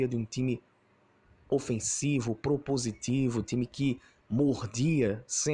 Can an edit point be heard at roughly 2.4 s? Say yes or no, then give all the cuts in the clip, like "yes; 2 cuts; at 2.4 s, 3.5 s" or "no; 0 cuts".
no; 0 cuts